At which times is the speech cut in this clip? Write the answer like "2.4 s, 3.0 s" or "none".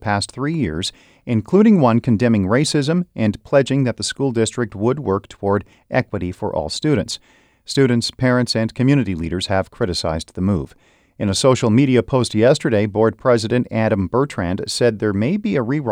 none